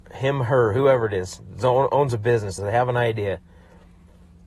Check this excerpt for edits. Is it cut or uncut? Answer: cut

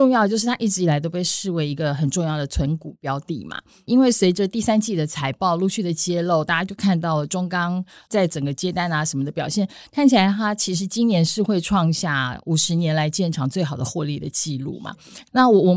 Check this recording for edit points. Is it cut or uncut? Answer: uncut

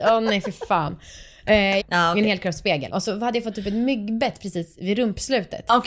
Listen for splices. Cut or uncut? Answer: cut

